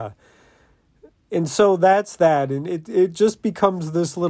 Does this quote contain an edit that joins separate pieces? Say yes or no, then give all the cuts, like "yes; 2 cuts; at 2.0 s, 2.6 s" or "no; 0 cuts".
no; 0 cuts